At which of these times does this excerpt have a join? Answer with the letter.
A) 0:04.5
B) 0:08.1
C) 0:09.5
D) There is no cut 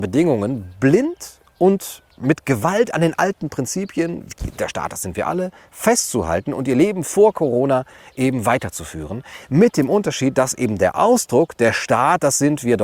D